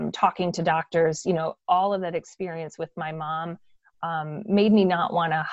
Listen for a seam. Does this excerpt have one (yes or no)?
no